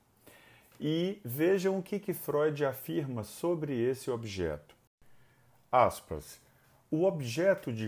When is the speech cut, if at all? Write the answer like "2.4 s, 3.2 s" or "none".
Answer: none